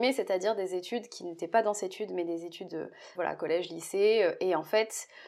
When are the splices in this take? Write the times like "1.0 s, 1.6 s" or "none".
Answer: 3.1 s